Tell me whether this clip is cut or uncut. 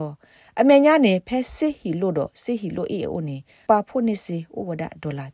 cut